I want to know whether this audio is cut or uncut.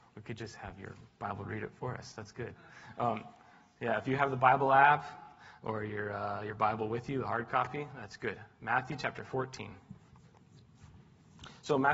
uncut